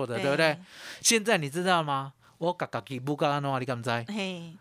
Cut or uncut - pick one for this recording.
uncut